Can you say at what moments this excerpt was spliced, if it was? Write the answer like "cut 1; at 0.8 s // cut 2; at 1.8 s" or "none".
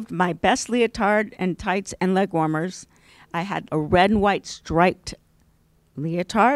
cut 1; at 3.7 s